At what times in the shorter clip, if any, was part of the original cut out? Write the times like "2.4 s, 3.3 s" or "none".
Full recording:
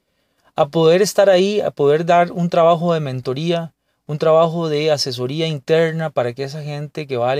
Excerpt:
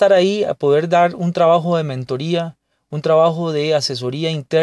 none

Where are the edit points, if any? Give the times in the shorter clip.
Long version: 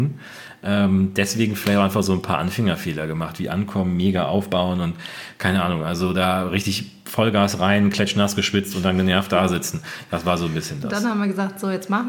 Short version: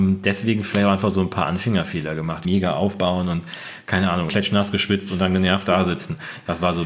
2.4 s, 4.3 s

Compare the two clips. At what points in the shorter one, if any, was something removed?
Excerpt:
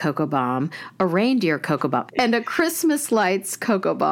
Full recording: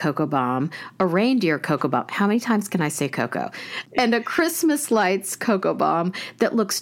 2.1 s

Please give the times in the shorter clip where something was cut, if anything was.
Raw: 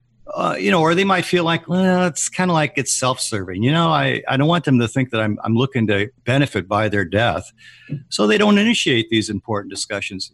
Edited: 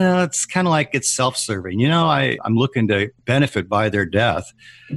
2.4 s

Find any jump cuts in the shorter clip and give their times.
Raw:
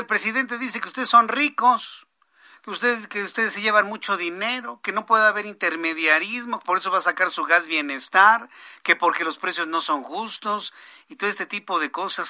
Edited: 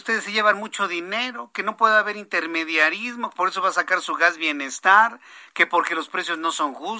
none

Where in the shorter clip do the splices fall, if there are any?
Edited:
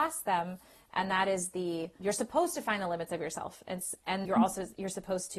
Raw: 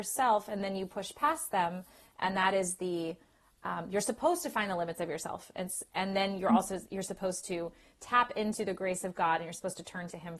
2.0 s, 4.2 s

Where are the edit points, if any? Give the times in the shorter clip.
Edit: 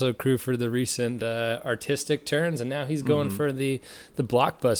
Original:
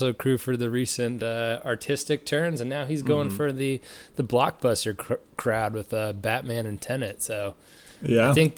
none

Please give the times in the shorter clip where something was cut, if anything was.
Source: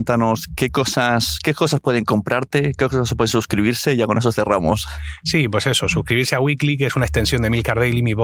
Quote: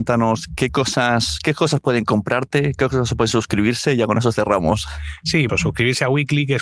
5.5 s

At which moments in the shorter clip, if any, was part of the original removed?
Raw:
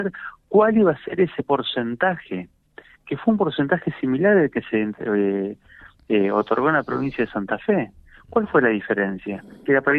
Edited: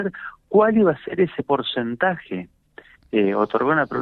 3.0 s

